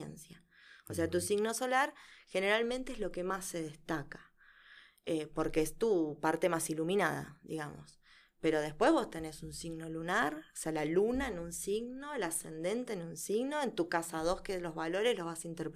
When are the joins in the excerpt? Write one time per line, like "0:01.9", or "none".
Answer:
none